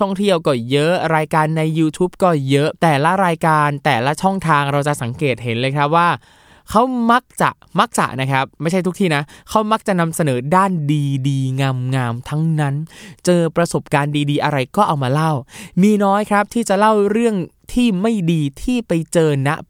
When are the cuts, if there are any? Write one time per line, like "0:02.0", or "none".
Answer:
0:02.8
0:08.5